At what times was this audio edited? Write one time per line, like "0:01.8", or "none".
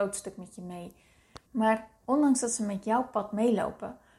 0:01.5